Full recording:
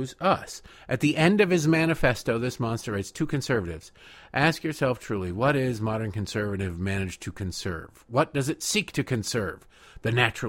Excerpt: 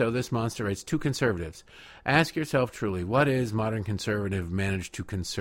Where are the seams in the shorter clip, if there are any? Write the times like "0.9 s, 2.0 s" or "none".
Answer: none